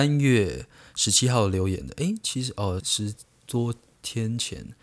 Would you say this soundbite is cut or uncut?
cut